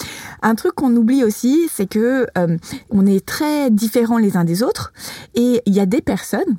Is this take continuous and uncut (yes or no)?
yes